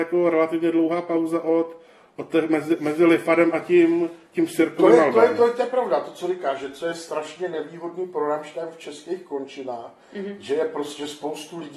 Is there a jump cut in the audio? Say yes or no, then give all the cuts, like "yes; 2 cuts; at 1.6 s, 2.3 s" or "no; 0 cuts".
no; 0 cuts